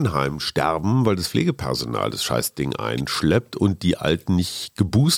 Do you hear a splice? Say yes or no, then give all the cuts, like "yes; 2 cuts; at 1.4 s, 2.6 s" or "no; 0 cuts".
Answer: no; 0 cuts